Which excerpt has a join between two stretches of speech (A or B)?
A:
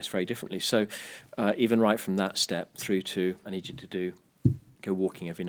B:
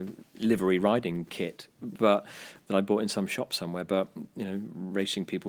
A